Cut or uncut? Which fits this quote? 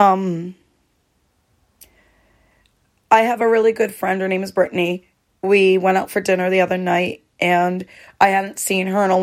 uncut